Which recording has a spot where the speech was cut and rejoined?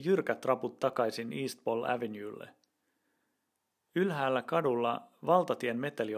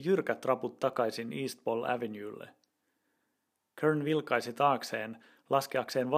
second; 1 cut; at 3.7 s

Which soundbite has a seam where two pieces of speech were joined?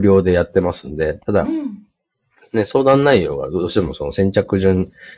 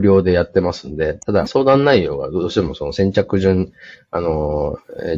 second; 1 cut; at 1.5 s

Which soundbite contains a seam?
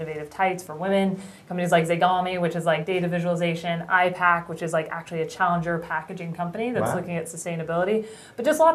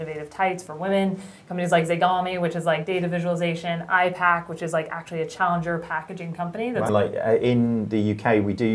second; 1 cut; at 6.9 s

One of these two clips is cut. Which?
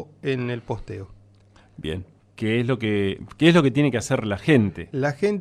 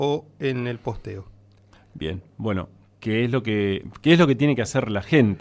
first; 1 cut; at 2.2 s

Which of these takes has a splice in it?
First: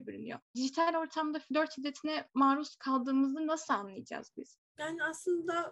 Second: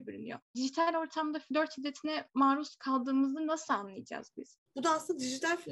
second; 1 cut; at 4.7 s

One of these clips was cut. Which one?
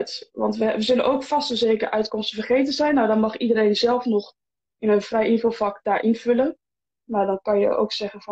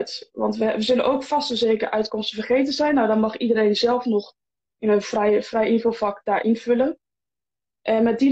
first; 2 cuts; at 5.0 s, 7.0 s

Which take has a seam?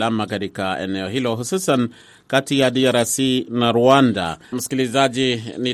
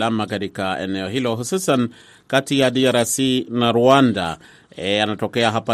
first; 1 cut; at 4.5 s

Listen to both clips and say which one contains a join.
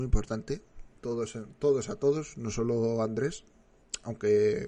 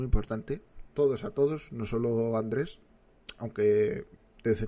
second; 1 cut; at 0.9 s

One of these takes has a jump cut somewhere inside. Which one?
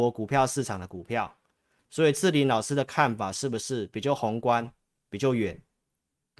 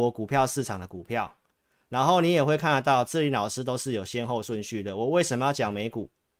first; 1 cut; at 1.8 s

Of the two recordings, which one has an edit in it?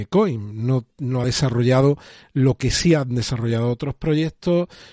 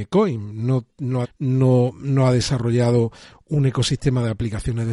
second; 1 cut; at 1.2 s

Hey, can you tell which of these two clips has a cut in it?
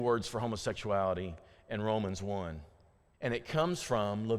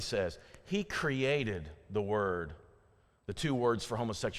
first; 1 cut; at 3.1 s

